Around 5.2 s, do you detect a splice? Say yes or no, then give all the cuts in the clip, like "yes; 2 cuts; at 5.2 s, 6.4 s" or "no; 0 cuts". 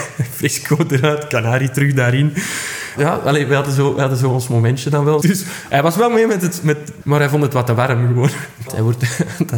yes; 3 cuts; at 5.2 s, 7.0 s, 8.7 s